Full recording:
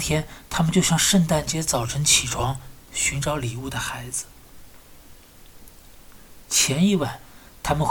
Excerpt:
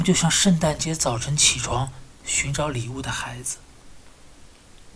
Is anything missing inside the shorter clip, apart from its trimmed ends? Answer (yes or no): no